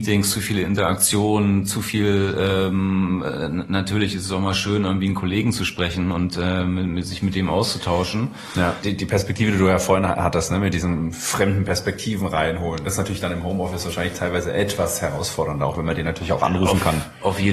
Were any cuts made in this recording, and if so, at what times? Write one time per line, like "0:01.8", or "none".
0:08.8